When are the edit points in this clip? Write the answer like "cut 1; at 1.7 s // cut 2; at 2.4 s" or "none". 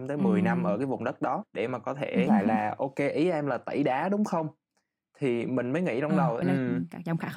cut 1; at 2.3 s // cut 2; at 6.4 s

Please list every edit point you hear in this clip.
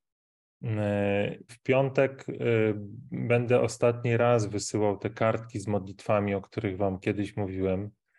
cut 1; at 1.5 s

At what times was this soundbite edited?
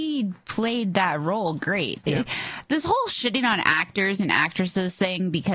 cut 1; at 2.0 s

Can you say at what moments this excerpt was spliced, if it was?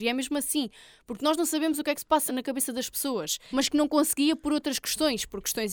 cut 1; at 2.3 s // cut 2; at 3.5 s

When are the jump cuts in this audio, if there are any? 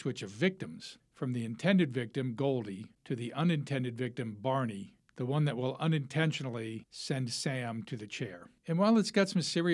cut 1; at 8.6 s

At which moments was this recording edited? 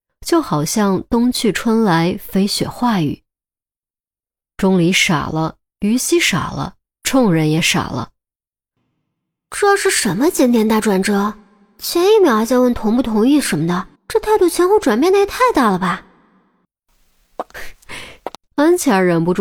cut 1; at 14.0 s // cut 2; at 18.3 s

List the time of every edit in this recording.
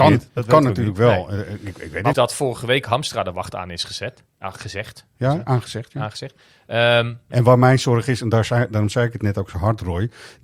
cut 1; at 2.1 s // cut 2; at 4.3 s // cut 3; at 7.3 s

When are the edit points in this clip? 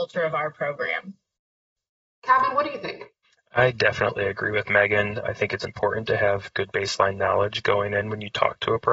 none

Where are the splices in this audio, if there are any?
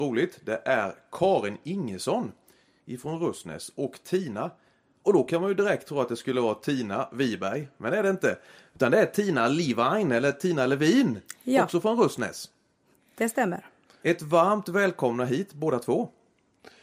none

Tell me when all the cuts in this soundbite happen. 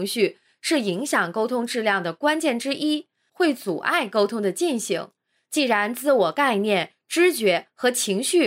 cut 1; at 3.3 s

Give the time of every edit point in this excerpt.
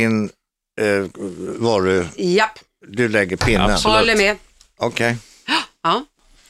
none

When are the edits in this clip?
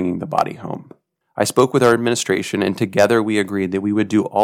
cut 1; at 1.2 s

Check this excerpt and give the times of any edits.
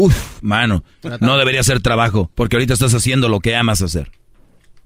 cut 1; at 2.3 s

